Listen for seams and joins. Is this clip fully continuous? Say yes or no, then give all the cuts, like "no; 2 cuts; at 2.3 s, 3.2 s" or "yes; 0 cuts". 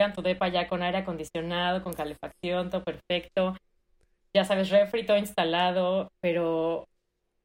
yes; 0 cuts